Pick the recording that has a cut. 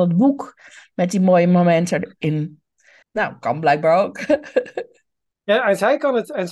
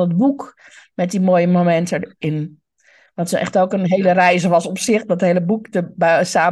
first; 1 cut; at 3.0 s

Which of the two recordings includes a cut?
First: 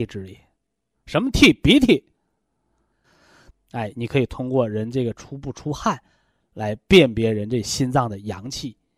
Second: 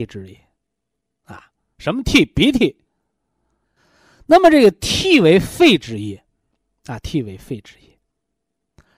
first; 2 cuts; at 0.9 s, 3.5 s

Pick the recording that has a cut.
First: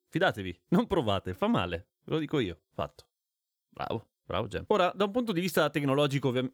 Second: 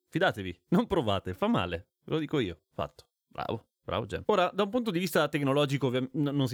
second; 1 cut; at 3.2 s

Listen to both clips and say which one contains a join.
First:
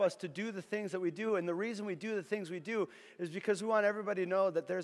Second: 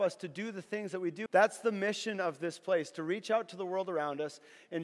second; 1 cut; at 1.3 s

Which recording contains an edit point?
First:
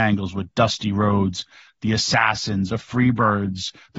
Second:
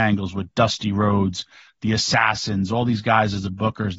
first; 1 cut; at 2.7 s

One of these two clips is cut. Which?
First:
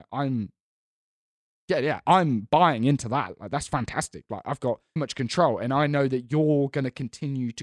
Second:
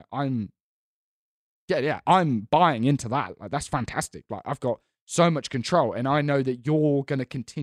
first; 1 cut; at 5.0 s

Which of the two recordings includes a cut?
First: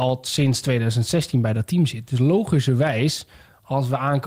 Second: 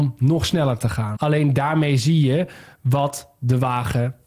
second; 1 cut; at 1.2 s

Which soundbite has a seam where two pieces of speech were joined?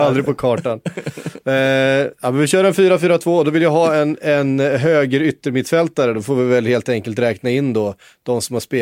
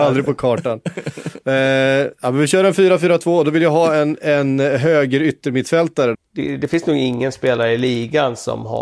second; 1 cut; at 6.1 s

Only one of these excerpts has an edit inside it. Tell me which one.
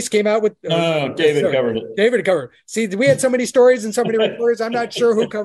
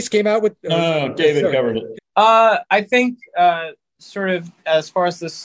second; 1 cut; at 1.9 s

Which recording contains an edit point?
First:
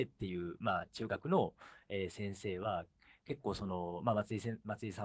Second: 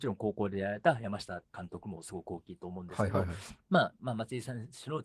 second; 1 cut; at 3.6 s

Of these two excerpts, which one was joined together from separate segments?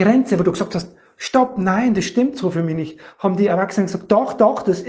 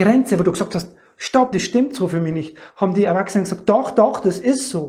second; 1 cut; at 1.5 s

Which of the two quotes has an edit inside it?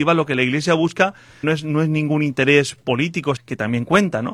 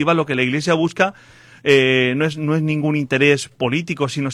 first; 2 cuts; at 1.4 s, 3.4 s

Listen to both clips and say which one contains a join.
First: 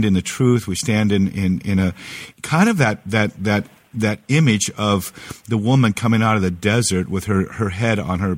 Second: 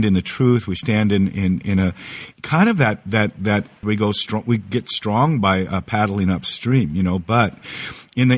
second; 1 cut; at 3.8 s

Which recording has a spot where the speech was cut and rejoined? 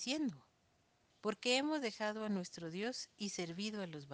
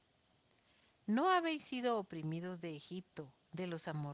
first; 1 cut; at 1.1 s

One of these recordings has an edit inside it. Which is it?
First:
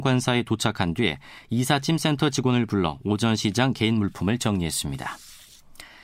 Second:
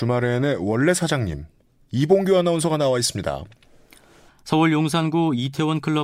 second; 1 cut; at 4.3 s

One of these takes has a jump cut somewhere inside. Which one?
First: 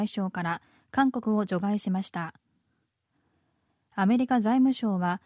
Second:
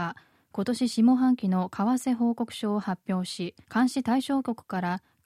second; 1 cut; at 3.6 s

